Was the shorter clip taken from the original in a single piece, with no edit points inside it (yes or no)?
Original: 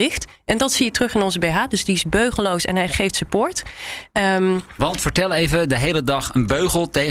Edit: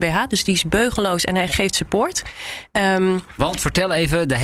yes